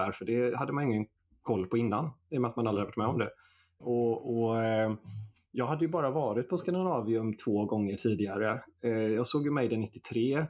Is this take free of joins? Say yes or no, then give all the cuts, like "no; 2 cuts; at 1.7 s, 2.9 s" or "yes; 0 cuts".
no; 1 cut; at 3.8 s